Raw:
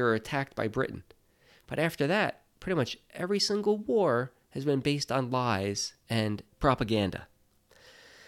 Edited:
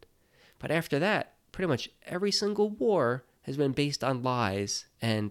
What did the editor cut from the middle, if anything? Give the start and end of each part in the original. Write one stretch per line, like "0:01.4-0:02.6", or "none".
none